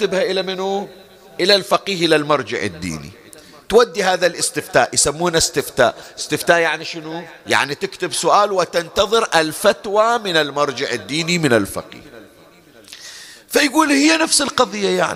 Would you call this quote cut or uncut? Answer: cut